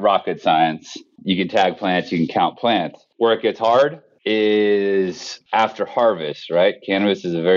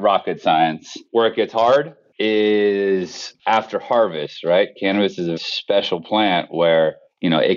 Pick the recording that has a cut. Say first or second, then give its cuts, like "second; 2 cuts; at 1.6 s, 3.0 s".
second; 2 cuts; at 1.1 s, 5.4 s